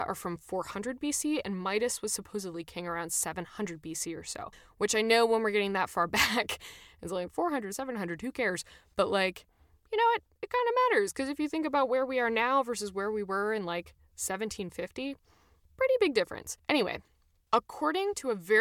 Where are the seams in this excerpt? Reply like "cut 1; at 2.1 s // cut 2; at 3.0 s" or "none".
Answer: none